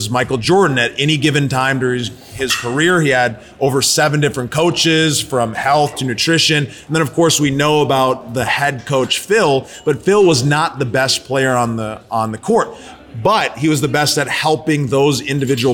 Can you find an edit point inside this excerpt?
no; 0 cuts

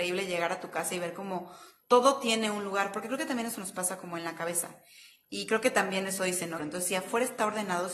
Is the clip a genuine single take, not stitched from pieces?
no; 1 cut; at 6.6 s

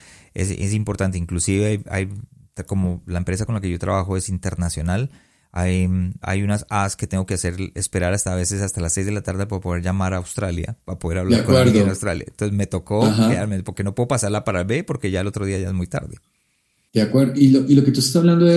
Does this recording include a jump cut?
yes; 1 cut; at 6.2 s

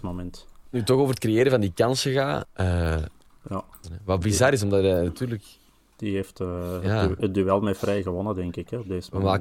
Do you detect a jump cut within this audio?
yes; 2 cuts; at 2.4 s, 3.8 s

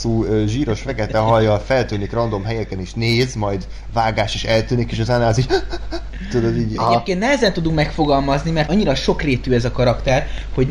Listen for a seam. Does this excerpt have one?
yes; 2 cuts; at 6.8 s, 8.7 s

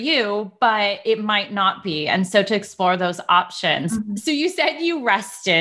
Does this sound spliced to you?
no; 0 cuts

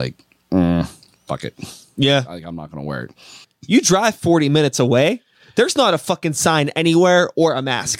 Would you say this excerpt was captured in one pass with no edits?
no; 1 cut; at 3.4 s

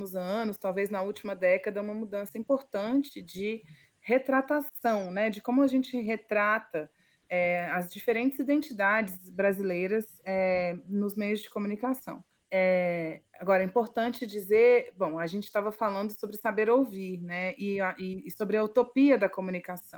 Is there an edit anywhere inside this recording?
no; 0 cuts

